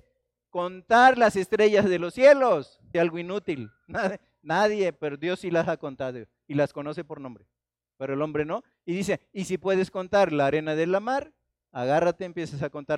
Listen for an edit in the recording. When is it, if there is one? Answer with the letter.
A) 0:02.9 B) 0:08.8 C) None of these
A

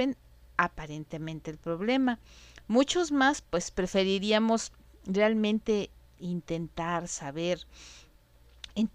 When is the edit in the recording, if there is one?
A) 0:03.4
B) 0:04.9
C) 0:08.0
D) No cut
A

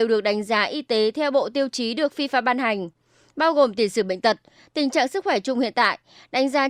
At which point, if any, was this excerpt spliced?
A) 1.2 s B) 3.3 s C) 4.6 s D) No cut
D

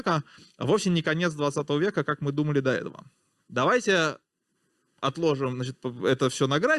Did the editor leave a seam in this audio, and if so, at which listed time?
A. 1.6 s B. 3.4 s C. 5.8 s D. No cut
B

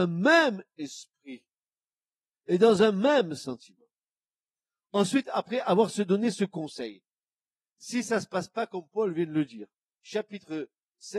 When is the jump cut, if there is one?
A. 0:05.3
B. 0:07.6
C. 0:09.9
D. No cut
C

